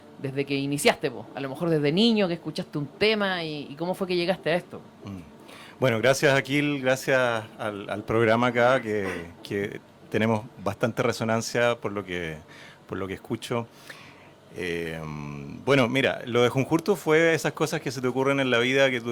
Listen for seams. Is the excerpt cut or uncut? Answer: uncut